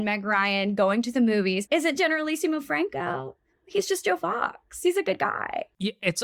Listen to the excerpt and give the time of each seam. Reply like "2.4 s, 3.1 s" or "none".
1.7 s

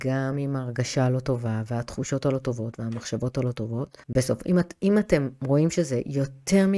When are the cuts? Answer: 4.0 s

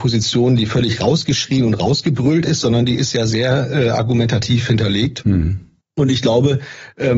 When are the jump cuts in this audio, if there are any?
none

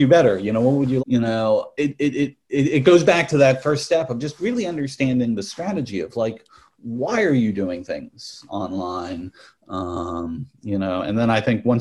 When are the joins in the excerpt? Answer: 1.0 s, 8.5 s

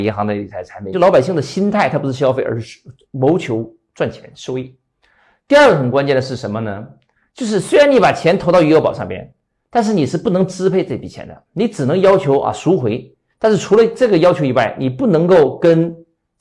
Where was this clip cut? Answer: 0.9 s

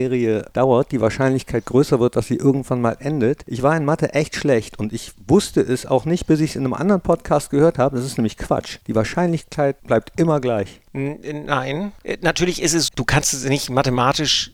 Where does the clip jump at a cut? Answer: 12.9 s

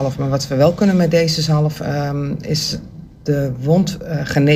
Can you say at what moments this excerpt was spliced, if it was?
none

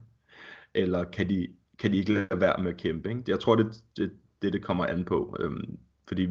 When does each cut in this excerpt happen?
none

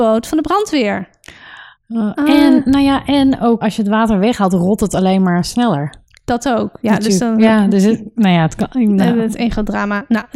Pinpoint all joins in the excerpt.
3.6 s

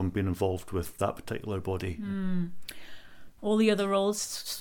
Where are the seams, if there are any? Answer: 3.4 s

